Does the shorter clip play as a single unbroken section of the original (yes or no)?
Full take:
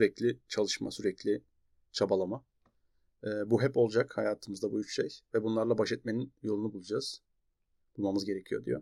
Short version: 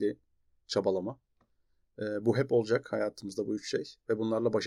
yes